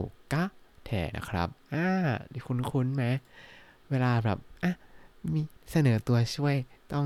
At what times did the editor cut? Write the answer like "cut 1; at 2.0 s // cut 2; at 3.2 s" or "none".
cut 1; at 1.1 s